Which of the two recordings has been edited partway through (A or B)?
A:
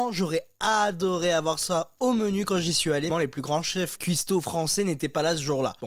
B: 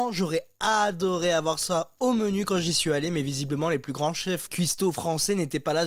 A